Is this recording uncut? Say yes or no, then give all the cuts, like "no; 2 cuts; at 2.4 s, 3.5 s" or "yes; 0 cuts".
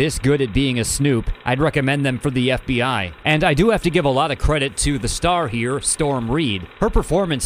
no; 1 cut; at 3.2 s